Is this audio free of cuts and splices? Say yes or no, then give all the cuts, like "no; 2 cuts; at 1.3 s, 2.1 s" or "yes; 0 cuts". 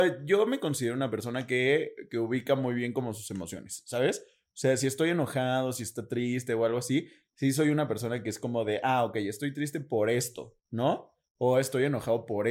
yes; 0 cuts